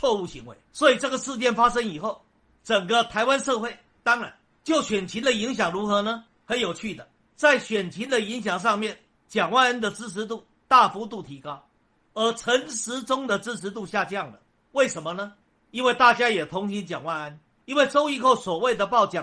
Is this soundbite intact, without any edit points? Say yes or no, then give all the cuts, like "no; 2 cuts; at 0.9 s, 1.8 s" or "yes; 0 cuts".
no; 1 cut; at 4.0 s